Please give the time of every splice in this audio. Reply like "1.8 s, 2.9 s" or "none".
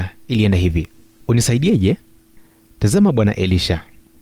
1.2 s